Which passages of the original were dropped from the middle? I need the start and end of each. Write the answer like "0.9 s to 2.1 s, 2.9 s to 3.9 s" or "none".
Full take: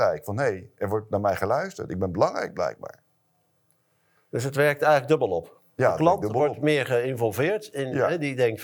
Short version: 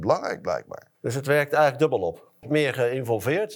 3.1 s to 4.2 s, 5.7 s to 6.5 s